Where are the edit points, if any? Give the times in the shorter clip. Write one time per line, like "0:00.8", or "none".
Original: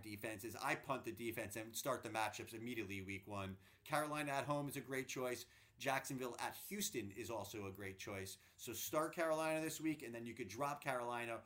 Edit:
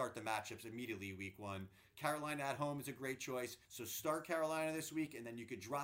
0:03.7